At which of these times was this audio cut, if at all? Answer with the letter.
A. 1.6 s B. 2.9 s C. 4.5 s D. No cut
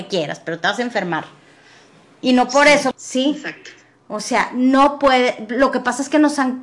B